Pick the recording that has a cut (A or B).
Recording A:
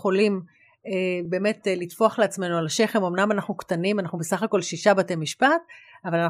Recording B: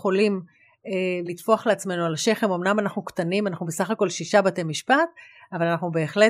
B